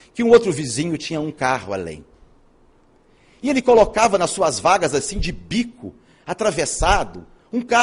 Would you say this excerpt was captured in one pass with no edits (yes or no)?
yes